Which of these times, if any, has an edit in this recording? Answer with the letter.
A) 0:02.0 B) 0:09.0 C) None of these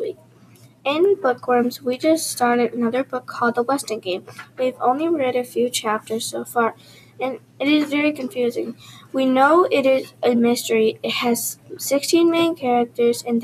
C